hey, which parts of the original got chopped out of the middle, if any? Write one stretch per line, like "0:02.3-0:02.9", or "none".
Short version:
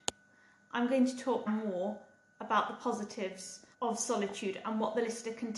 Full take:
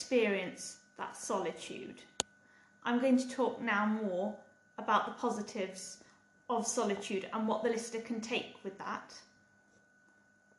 0:03.6-0:03.8
0:06.1-0:06.4

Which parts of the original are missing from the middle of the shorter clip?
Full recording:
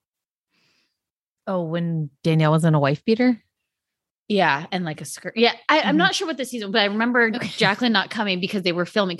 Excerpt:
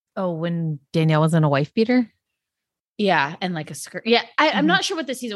none

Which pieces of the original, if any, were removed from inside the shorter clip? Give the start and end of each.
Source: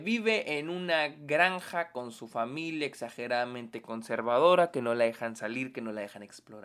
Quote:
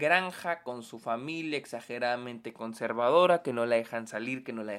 none

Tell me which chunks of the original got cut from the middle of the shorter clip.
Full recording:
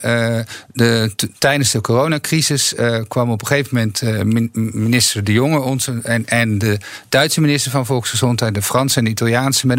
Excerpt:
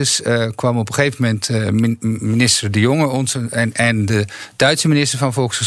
none

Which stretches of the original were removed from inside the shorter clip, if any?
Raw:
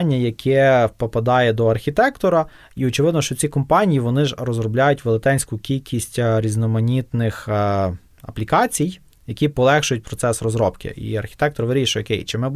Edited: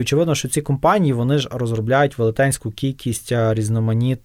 none

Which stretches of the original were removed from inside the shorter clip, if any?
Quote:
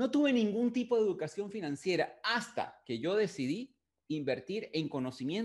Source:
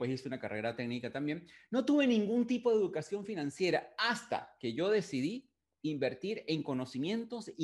none

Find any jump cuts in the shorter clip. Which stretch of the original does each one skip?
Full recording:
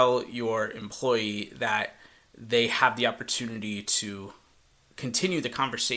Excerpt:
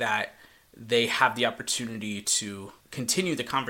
0:04.4-0:04.8

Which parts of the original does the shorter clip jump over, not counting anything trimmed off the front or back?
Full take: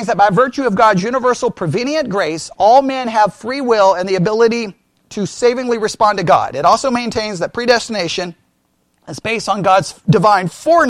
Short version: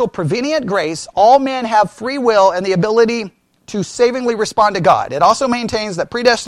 none

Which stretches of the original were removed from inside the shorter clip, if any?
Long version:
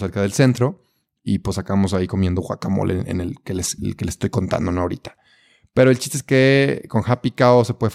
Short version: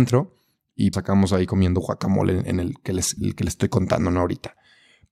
0:01.4-0:01.5

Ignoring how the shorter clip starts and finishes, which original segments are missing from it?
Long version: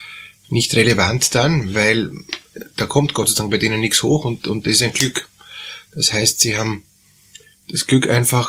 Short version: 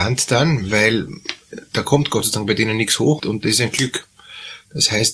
0:04.2-0:04.4

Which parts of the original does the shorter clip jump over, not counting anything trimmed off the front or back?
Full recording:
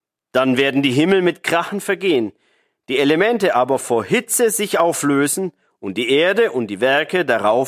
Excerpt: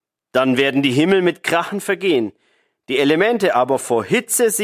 none

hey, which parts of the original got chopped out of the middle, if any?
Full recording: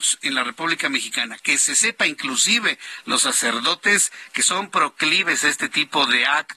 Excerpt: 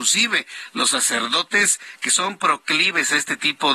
none

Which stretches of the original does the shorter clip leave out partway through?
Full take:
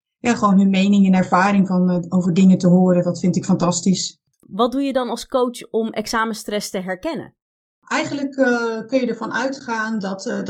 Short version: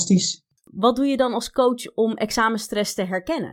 none

